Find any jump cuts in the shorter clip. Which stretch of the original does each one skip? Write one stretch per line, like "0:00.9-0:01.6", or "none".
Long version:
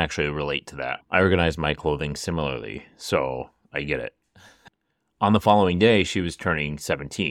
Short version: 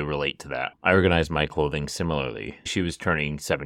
0:02.9-0:06.0